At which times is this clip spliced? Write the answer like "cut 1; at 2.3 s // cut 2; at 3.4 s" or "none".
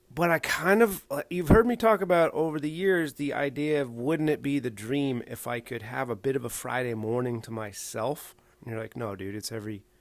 cut 1; at 8.5 s